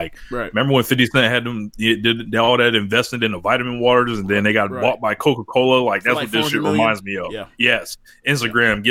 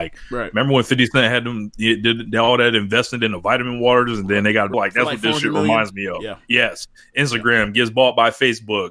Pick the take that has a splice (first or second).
second